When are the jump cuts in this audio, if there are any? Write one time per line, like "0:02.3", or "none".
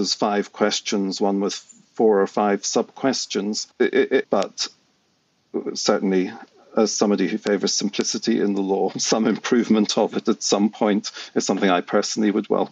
0:04.2